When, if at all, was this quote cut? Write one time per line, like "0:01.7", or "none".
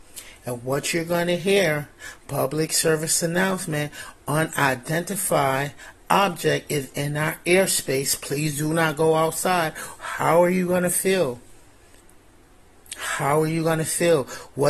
none